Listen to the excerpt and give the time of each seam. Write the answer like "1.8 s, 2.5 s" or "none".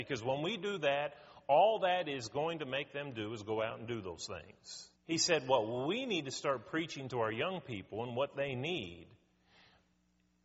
5.0 s